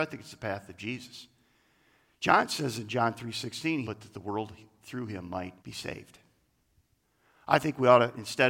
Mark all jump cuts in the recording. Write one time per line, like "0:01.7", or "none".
0:03.8
0:05.6